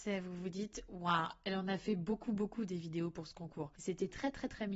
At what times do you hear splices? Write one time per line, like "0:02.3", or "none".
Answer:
0:03.7